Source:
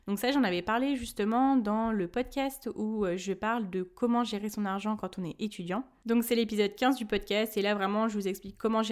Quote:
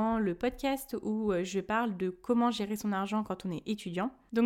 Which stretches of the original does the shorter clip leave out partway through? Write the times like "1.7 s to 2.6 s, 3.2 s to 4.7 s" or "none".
none